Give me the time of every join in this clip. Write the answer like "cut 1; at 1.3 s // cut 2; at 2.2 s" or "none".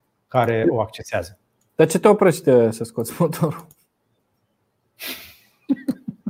none

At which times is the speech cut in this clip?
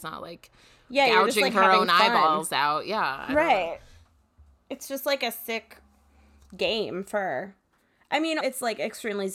cut 1; at 8.4 s

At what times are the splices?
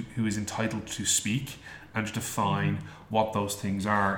none

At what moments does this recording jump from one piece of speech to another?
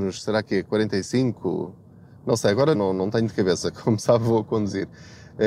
cut 1; at 2.7 s

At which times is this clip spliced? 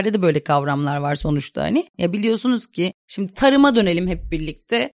cut 1; at 1.9 s

